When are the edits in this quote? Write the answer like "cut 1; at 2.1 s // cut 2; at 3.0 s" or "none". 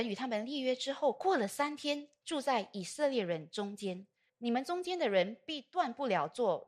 cut 1; at 2.2 s // cut 2; at 4.3 s